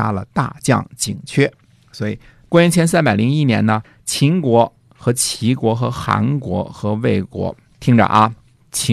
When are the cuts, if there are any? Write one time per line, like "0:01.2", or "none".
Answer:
0:02.5

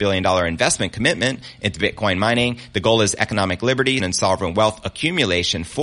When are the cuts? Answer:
0:04.0

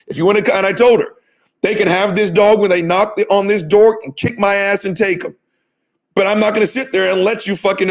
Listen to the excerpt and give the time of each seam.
none

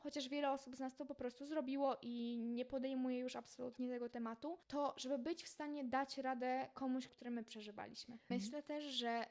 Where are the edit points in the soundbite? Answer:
0:04.6
0:07.1
0:08.3

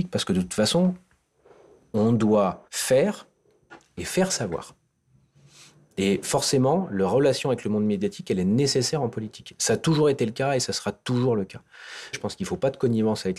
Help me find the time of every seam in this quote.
0:02.7
0:12.1

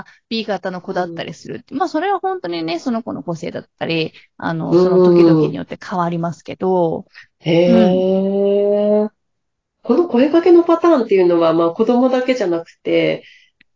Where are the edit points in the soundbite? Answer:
none

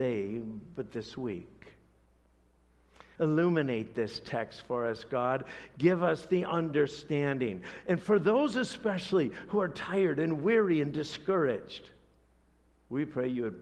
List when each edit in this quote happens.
0:03.2

